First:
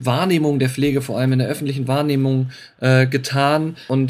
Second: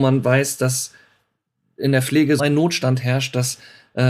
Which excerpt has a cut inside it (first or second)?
second